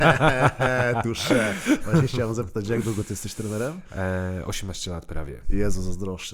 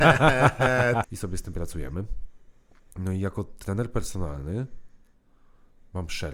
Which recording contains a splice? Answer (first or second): second